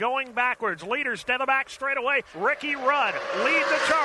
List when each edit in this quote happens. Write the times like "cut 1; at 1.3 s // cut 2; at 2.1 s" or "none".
cut 1; at 2.3 s

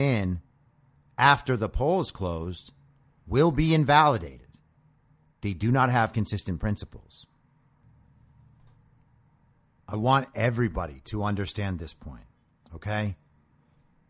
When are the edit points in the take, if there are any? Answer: cut 1; at 5.3 s

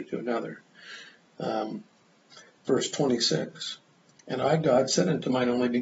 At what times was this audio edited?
none

